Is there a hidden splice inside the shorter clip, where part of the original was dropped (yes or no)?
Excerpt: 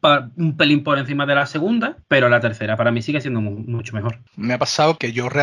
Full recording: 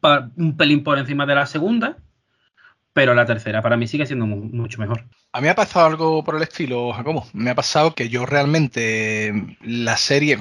yes